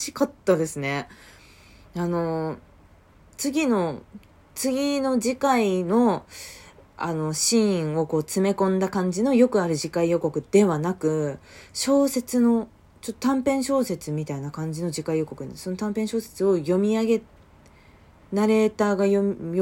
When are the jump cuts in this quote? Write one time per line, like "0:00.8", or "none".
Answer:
none